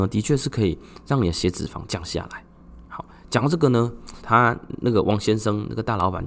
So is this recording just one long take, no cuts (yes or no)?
no